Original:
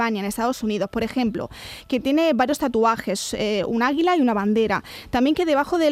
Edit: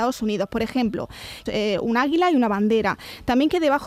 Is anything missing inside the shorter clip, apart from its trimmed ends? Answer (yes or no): yes